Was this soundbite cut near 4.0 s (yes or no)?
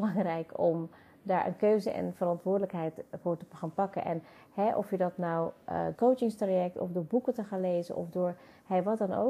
no